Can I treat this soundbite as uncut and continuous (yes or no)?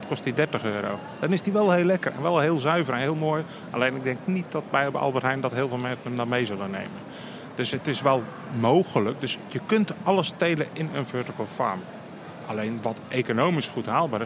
yes